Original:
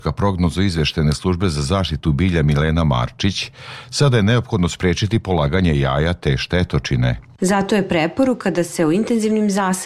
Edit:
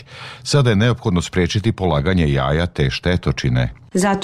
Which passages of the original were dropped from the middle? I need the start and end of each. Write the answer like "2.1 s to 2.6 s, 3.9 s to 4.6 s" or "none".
none